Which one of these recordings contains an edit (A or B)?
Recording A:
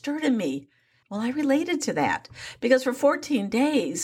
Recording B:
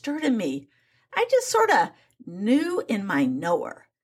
A